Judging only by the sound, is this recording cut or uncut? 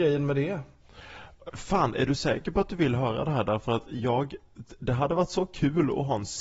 cut